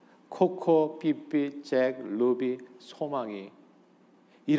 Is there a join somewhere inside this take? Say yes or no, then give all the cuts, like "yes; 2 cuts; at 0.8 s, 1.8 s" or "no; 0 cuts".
no; 0 cuts